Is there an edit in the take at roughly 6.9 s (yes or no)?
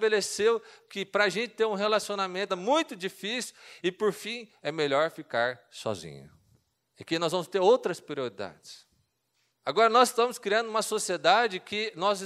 yes